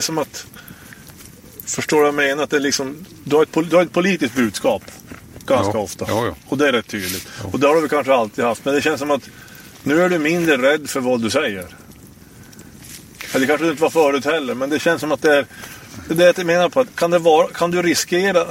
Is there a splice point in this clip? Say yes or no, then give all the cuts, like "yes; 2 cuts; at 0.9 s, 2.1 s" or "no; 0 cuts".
no; 0 cuts